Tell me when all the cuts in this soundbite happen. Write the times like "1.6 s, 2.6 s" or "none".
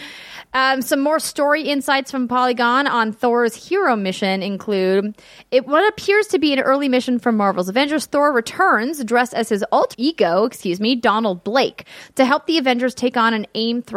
9.9 s